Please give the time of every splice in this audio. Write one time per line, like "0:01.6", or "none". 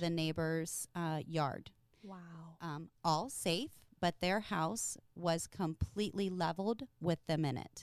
none